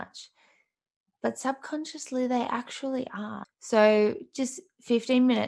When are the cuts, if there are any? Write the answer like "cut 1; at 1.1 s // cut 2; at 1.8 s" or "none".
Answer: cut 1; at 3.4 s